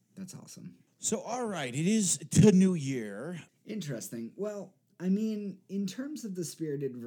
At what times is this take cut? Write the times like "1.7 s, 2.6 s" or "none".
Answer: 3.5 s

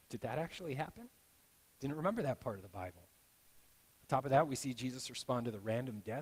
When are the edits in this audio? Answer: none

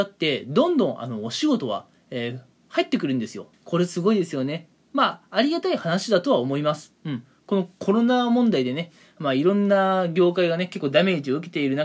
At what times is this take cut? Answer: 3.5 s

